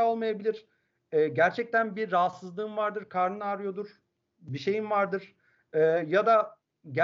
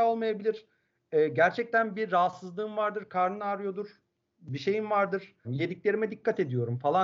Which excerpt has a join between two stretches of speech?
second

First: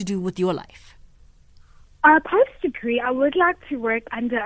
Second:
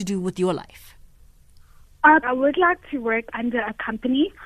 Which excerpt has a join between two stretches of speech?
second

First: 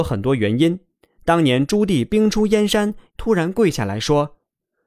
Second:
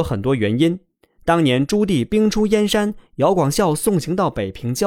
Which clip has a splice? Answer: first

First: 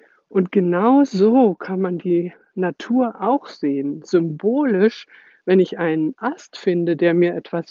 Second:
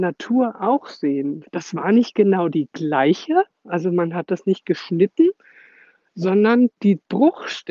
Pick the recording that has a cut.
second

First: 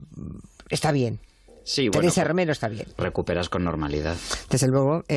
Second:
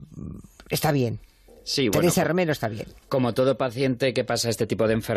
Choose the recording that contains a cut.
first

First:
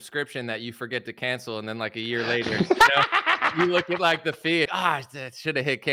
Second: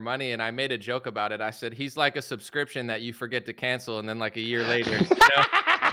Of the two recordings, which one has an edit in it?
first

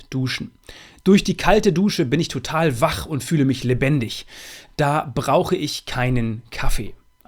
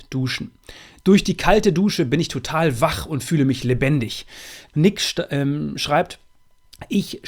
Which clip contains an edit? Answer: second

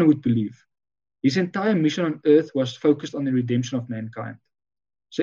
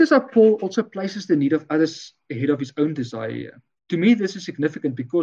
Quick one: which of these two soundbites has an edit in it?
second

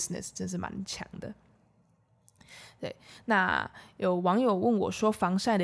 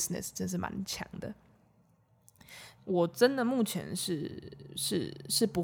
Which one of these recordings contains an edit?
second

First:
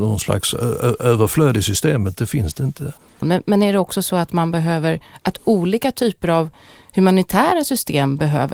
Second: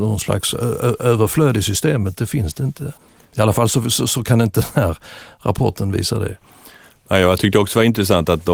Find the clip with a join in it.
first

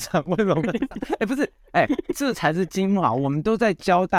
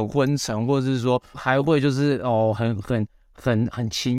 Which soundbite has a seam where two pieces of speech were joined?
second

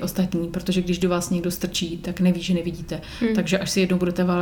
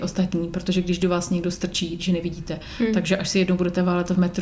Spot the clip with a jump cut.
second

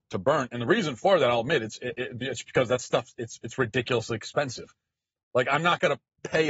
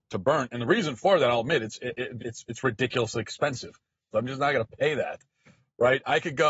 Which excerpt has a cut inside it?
second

